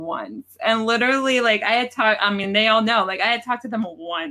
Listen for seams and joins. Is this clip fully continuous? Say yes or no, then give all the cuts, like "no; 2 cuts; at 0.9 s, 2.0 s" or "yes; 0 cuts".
yes; 0 cuts